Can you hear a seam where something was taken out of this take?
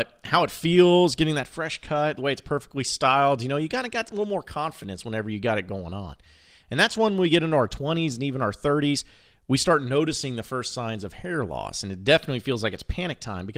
no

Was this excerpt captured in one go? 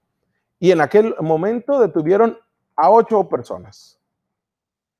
yes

